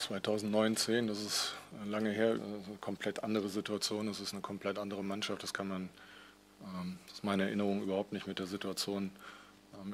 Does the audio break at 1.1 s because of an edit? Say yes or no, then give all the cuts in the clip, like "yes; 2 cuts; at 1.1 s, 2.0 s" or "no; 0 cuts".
no; 1 cut; at 2.4 s